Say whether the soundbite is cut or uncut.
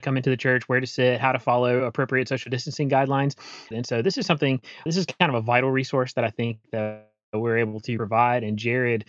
cut